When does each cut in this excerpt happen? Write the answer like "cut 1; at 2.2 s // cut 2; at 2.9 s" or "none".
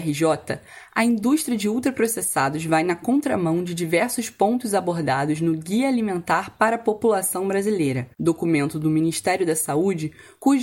cut 1; at 8.1 s